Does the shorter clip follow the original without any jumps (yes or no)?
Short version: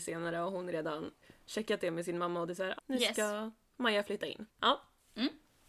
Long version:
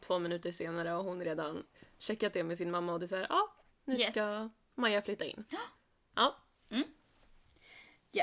no